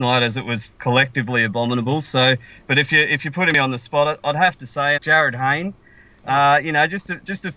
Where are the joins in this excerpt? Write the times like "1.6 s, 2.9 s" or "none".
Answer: 5.0 s